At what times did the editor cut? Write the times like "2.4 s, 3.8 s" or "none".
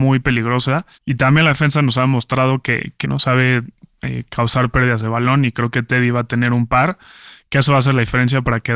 0.9 s, 3.0 s